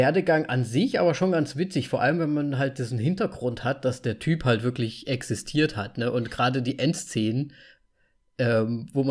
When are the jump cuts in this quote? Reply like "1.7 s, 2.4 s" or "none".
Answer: none